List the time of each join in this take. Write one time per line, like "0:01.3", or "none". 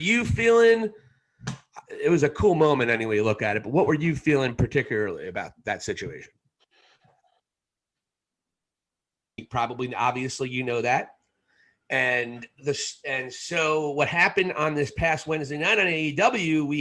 0:09.4

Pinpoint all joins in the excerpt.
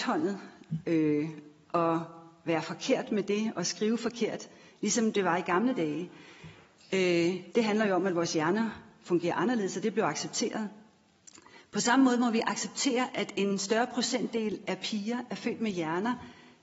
0:07.5

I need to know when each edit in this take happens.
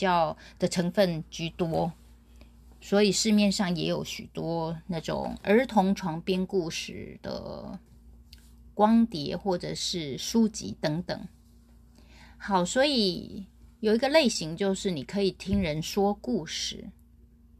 none

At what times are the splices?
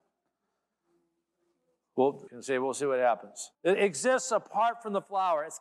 0:02.3
0:03.6

